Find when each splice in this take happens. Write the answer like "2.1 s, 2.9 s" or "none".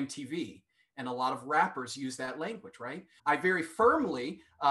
3.2 s